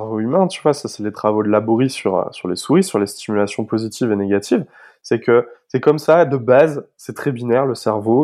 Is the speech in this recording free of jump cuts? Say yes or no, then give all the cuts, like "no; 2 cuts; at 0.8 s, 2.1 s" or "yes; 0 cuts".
yes; 0 cuts